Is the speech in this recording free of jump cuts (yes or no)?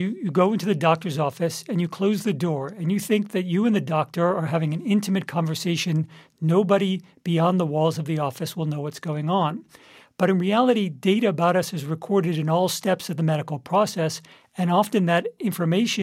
yes